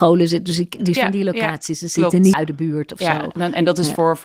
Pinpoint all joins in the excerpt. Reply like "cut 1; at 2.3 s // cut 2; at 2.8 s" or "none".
cut 1; at 1.0 s // cut 2; at 2.3 s